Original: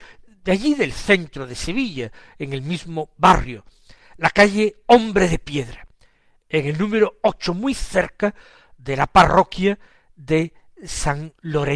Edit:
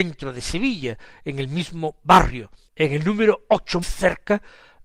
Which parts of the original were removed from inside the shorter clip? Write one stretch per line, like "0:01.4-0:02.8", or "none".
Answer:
0:03.8-0:06.4
0:07.6-0:07.7